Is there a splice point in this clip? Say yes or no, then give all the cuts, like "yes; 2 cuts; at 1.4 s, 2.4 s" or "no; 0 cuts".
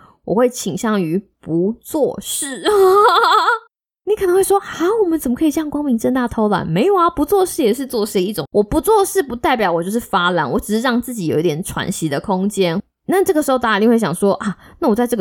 no; 0 cuts